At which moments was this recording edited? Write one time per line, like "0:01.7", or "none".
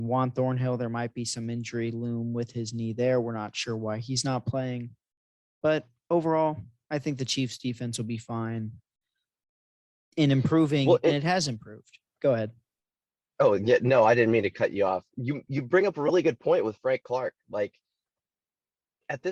none